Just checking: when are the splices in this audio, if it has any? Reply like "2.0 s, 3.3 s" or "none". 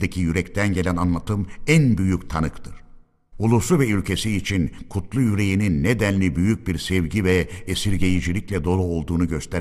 3.3 s